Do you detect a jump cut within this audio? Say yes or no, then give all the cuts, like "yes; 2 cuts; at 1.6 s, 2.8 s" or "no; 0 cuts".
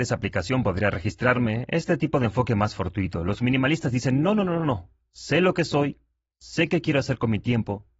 no; 0 cuts